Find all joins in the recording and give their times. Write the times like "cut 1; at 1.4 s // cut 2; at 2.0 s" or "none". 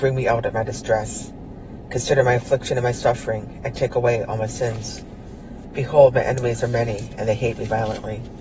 none